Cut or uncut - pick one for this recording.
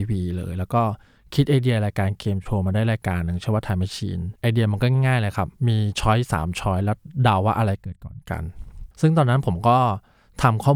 cut